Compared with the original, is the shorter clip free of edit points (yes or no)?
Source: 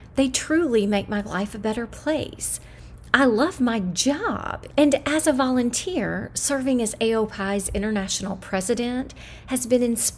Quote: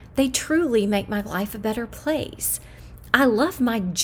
yes